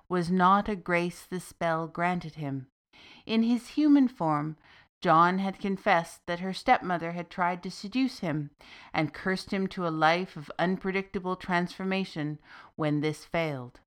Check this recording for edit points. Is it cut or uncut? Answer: uncut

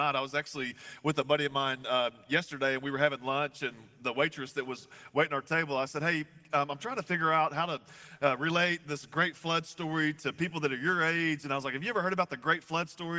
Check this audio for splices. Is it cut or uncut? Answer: uncut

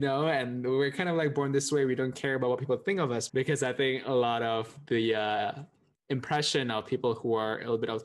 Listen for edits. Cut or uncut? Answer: cut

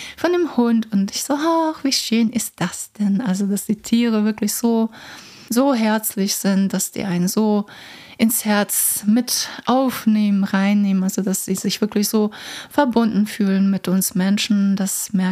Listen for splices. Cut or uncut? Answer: uncut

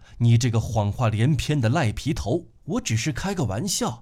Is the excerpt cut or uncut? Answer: cut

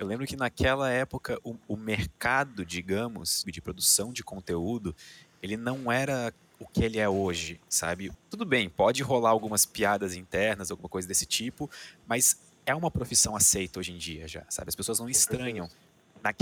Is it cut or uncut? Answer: cut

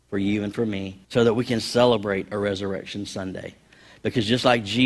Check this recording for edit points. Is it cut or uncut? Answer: cut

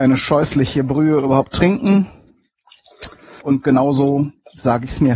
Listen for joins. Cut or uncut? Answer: cut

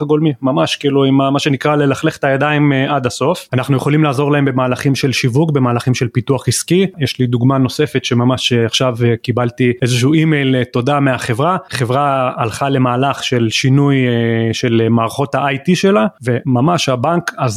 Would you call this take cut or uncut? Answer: cut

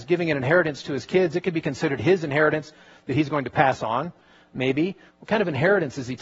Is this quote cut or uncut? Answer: cut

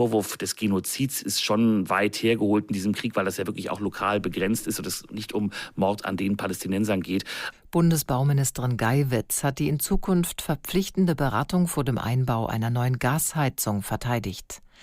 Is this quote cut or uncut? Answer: cut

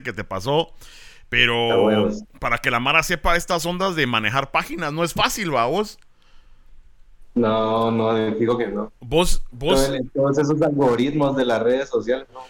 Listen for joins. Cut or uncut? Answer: uncut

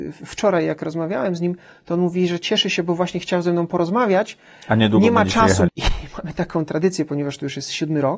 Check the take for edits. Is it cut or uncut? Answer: cut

